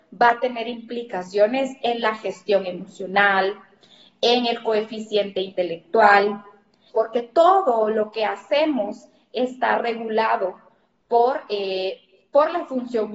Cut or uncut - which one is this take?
cut